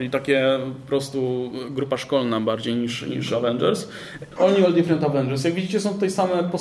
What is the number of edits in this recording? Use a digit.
1